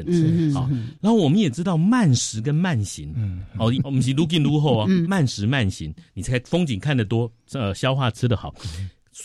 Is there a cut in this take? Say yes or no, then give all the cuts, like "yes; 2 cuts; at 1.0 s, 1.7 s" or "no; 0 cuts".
yes; 2 cuts; at 3.7 s, 5.0 s